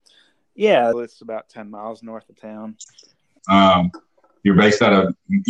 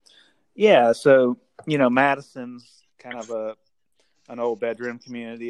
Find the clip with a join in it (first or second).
first